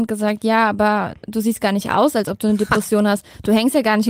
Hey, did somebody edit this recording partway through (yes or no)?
no